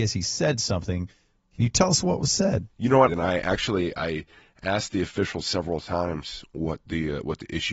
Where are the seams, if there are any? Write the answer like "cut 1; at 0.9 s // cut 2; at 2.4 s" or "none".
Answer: cut 1; at 3.1 s